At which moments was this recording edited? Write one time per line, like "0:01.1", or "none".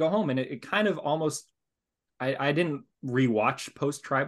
none